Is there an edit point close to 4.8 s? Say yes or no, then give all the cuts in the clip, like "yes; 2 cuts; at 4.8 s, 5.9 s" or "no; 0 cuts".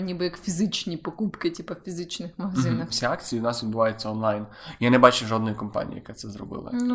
no; 1 cut; at 2.9 s